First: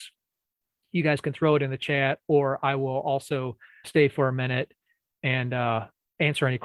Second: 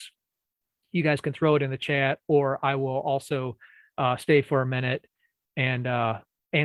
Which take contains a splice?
first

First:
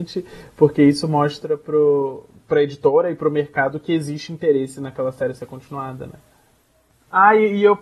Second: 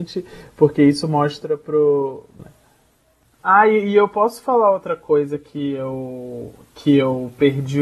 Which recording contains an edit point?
second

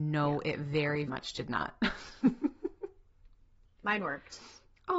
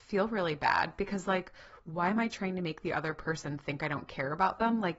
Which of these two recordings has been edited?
first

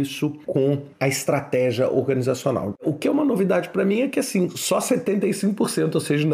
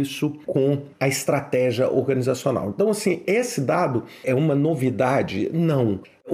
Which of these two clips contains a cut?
first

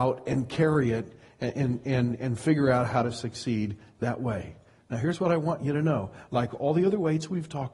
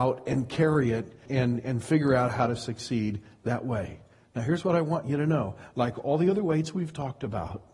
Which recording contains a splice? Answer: second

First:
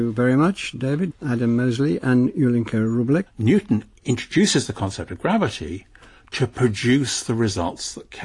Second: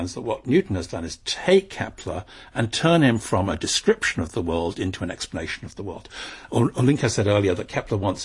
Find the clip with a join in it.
first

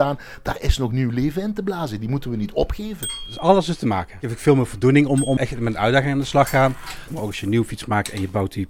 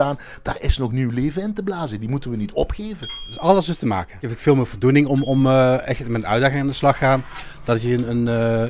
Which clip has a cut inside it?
first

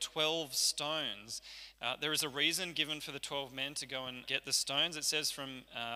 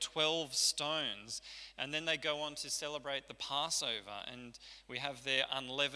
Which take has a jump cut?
first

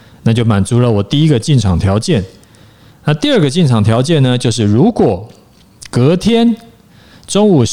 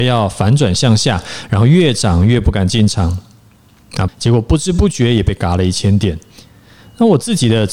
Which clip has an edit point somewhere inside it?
second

